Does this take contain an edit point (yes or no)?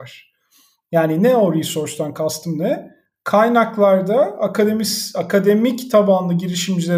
no